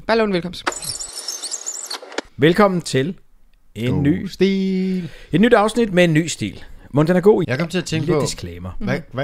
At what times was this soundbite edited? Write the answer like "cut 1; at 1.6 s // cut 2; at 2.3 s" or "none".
cut 1; at 2.3 s // cut 2; at 7.4 s